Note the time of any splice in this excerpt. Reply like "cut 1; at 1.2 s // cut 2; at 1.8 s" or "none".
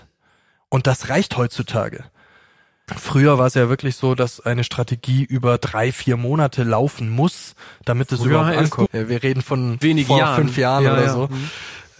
cut 1; at 2.9 s // cut 2; at 8.9 s